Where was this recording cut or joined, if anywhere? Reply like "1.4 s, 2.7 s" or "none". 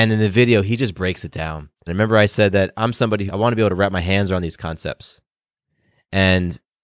1.9 s, 3.3 s